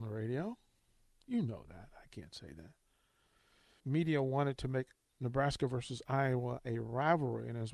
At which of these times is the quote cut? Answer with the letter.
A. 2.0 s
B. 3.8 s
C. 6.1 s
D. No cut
B